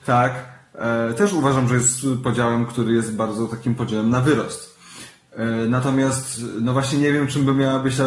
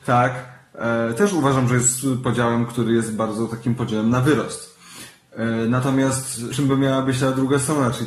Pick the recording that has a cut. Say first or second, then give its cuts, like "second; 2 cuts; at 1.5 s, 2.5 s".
second; 1 cut; at 6.5 s